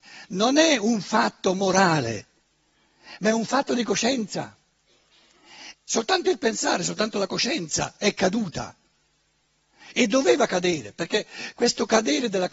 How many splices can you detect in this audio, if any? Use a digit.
1